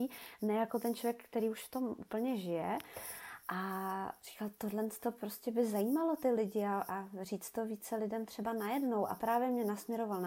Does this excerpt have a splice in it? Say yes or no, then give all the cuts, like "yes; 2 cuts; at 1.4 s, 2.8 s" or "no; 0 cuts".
no; 0 cuts